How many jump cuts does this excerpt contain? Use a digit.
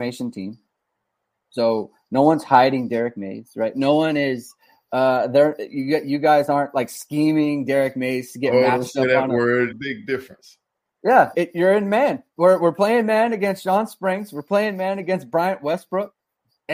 2